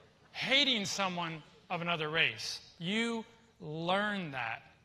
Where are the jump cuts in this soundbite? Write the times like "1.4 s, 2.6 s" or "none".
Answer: none